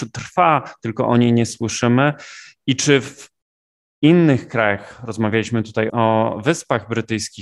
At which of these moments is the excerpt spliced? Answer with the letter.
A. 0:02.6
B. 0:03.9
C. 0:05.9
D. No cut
C